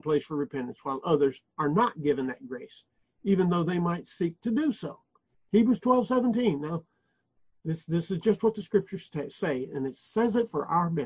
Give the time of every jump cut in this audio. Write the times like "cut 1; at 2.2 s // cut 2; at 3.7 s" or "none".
none